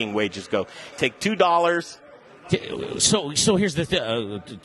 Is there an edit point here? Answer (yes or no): yes